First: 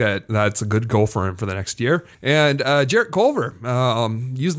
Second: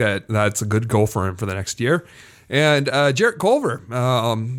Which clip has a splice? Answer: first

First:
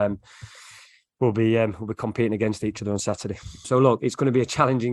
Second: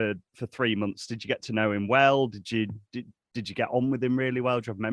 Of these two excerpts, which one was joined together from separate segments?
first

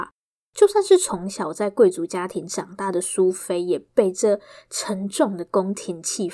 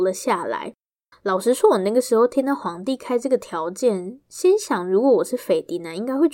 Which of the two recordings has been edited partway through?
second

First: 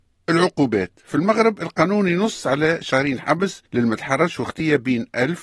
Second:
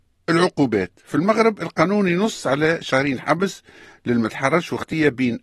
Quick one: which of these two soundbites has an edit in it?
first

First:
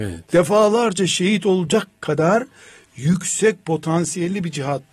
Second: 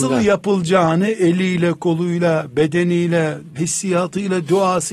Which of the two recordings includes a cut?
second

